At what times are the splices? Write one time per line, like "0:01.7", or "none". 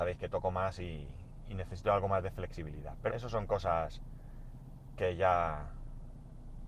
0:03.1

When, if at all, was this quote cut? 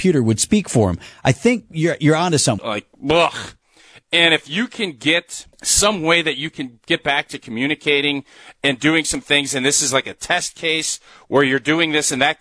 0:02.6
0:05.5

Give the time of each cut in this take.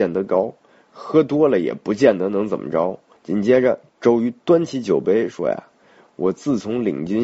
0:03.2

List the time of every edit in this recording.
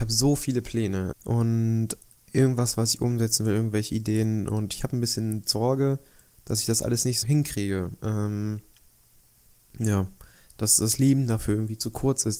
0:01.1
0:07.2

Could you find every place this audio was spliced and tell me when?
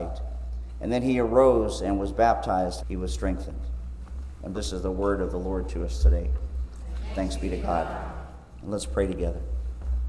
0:02.8
0:04.5

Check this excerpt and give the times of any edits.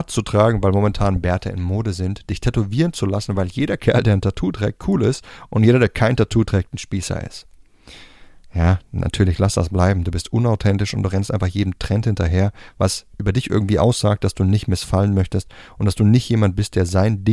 none

